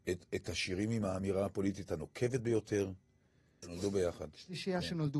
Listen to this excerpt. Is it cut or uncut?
cut